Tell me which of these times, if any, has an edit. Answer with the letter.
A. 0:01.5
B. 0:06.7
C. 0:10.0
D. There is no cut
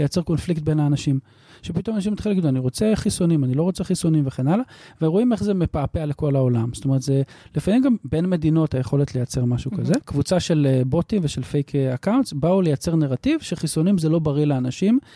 C